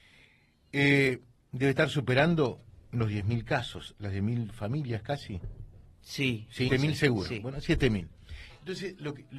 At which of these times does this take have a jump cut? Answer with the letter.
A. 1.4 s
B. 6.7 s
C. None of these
B